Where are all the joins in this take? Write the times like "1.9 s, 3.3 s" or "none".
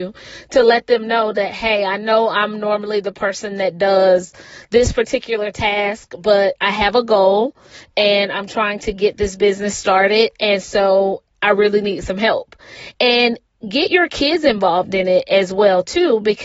none